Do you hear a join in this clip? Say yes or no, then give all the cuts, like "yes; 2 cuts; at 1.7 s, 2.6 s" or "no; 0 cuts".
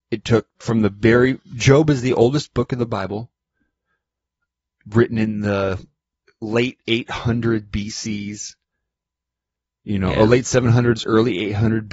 no; 0 cuts